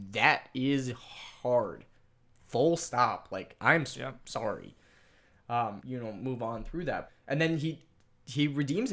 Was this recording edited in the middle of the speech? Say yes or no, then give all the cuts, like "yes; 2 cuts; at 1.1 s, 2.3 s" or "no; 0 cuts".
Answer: yes; 2 cuts; at 5.8 s, 7.1 s